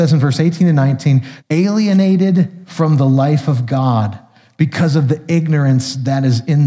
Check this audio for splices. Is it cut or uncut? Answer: cut